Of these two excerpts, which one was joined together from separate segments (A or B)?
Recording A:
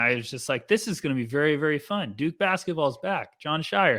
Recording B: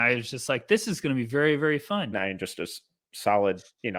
B